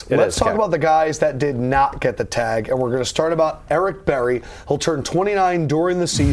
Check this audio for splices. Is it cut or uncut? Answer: cut